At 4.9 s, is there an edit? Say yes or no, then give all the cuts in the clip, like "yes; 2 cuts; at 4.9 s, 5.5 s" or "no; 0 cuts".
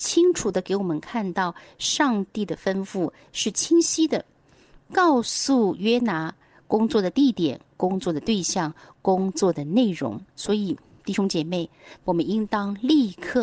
no; 2 cuts; at 10.3 s, 12.0 s